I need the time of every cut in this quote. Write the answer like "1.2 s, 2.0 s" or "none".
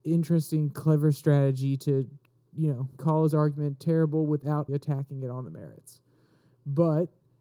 3.0 s, 4.7 s